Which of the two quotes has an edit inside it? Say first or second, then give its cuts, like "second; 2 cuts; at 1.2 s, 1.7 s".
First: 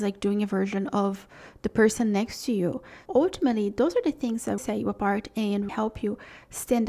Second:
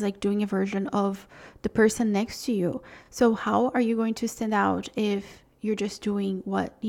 first; 3 cuts; at 3.1 s, 4.6 s, 5.7 s